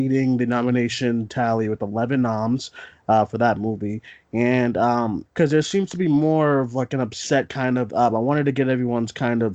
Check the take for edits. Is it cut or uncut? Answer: cut